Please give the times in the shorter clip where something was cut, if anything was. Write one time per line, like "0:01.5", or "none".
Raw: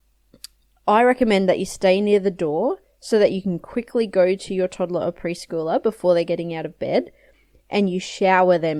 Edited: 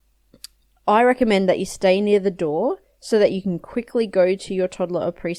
none